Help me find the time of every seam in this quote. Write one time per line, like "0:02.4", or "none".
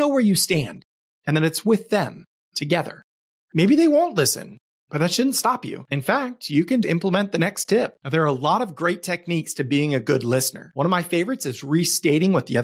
0:06.8